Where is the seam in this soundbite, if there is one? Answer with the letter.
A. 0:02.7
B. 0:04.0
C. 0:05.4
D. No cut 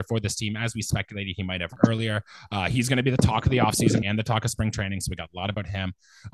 B